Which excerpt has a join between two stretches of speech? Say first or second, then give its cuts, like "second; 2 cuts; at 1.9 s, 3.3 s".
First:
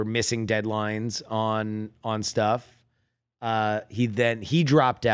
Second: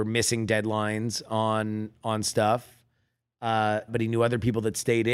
second; 1 cut; at 3.9 s